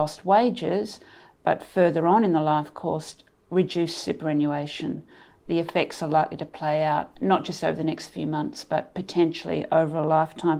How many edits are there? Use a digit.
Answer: 0